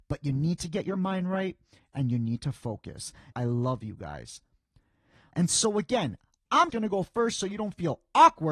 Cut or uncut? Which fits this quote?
cut